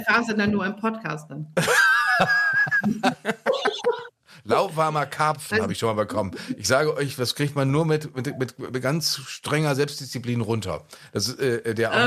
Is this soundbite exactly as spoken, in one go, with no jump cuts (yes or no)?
yes